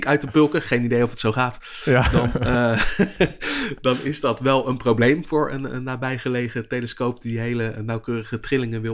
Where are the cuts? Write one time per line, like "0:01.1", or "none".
none

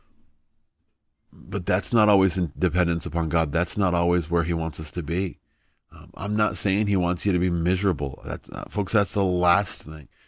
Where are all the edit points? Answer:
none

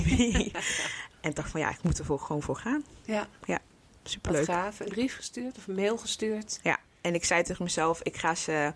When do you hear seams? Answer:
0:04.9

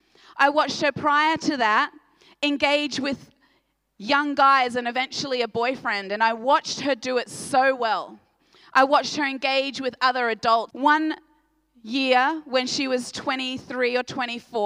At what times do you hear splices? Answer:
0:10.7

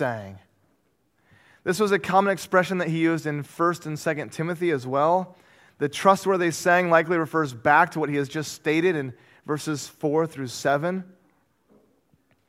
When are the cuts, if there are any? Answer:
none

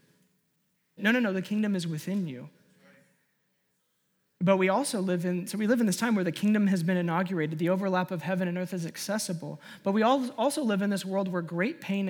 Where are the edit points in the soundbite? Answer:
0:01.0

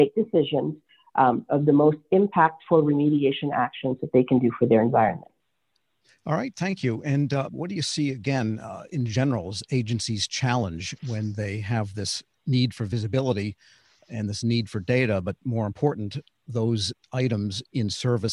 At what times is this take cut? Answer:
0:07.5

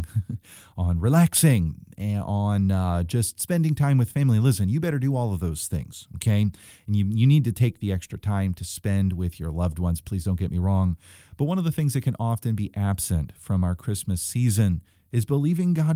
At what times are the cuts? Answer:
none

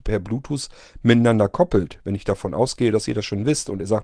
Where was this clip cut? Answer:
none

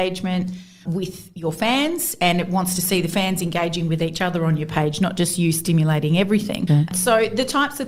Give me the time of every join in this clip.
none

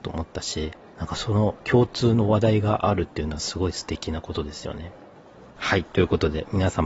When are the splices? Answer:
0:05.6

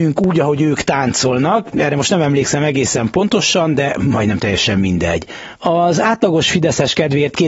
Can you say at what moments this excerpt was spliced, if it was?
0:05.6

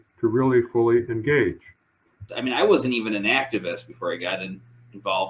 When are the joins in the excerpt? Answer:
0:02.3

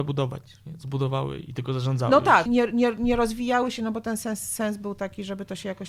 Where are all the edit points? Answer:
0:02.5

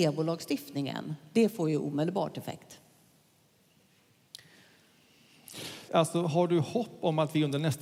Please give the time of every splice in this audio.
0:05.9

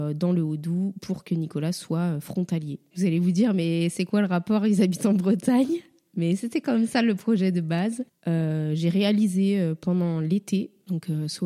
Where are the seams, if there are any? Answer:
0:08.1

